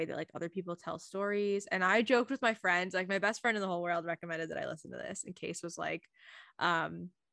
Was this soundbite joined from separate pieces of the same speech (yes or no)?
no